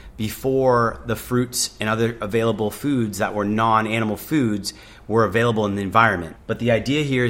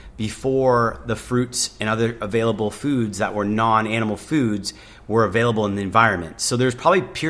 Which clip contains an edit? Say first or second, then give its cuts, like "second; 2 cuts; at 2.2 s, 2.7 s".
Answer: first; 1 cut; at 6.4 s